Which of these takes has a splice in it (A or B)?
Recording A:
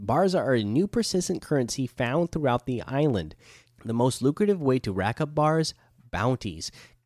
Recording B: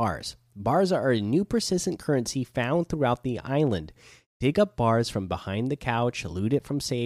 A